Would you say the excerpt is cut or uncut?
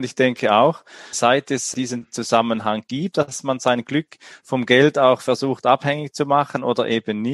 cut